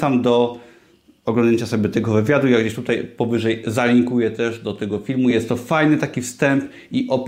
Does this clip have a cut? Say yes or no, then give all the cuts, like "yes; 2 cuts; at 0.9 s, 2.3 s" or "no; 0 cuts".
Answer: no; 0 cuts